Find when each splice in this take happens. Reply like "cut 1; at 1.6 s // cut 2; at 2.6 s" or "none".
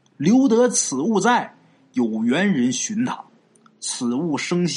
none